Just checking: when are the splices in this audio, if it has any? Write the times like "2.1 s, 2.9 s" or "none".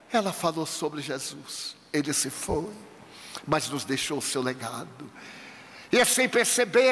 none